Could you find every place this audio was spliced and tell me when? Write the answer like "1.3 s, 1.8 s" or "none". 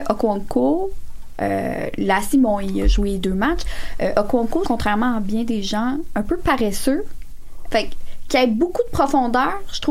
4.6 s, 7.7 s